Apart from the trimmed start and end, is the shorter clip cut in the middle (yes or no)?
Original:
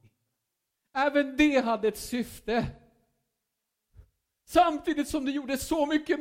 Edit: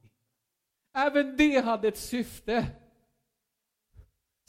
no